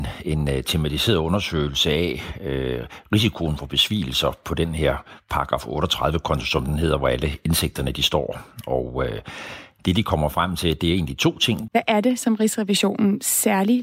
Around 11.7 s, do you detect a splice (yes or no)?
yes